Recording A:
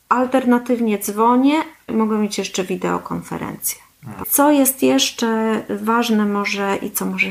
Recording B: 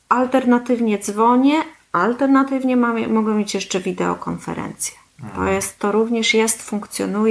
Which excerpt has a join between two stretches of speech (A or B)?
A